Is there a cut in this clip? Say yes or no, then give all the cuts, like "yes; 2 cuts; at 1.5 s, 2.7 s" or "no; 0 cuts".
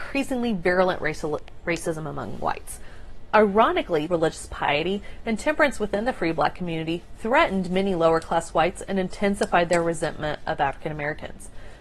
yes; 1 cut; at 4.1 s